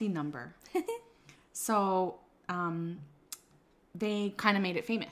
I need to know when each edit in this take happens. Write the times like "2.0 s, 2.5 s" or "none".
none